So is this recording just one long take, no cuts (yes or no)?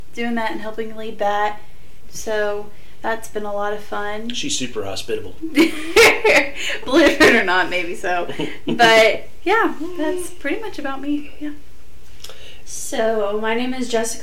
no